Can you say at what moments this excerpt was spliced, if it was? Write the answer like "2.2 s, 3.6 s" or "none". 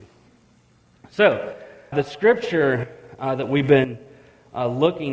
1.9 s